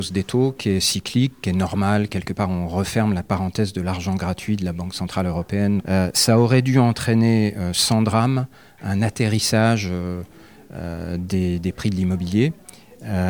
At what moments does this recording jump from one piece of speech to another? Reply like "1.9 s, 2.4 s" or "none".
5.8 s